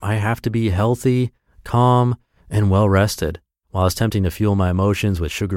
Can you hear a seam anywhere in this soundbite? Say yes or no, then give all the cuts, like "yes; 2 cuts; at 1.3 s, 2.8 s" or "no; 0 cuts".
yes; 1 cut; at 3.6 s